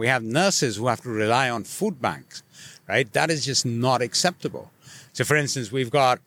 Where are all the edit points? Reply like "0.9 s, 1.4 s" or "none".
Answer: 5.1 s